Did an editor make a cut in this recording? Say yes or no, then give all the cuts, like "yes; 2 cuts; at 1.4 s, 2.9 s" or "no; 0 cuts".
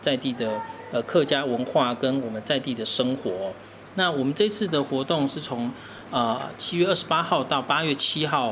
no; 0 cuts